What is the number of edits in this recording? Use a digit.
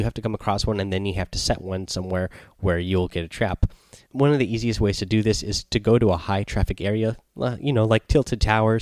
1